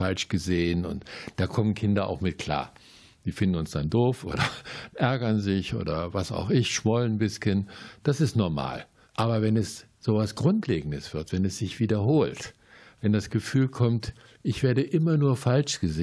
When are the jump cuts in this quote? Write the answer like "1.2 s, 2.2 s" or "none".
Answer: 9.0 s